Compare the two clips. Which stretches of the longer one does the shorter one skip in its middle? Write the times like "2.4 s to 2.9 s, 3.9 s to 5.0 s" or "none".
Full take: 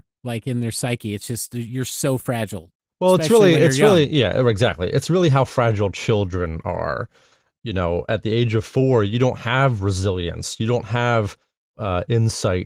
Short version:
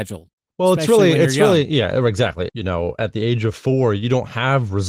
4.9 s to 7.6 s